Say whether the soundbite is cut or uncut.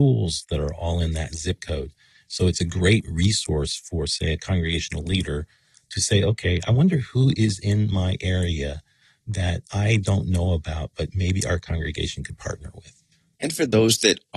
cut